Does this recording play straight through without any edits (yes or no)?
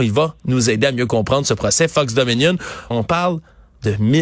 no